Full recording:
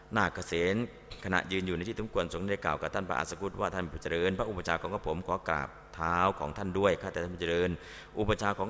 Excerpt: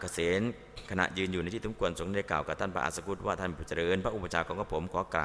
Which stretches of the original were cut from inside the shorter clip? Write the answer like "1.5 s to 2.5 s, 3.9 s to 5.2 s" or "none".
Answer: none